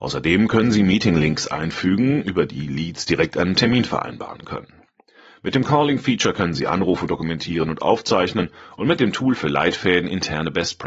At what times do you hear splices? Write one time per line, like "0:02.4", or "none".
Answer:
none